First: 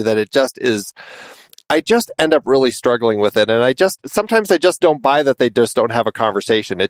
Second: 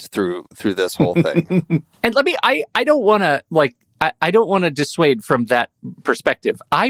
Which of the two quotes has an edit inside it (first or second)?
first